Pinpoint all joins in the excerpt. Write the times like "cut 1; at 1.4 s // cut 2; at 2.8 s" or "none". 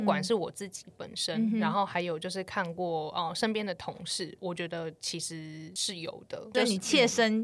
none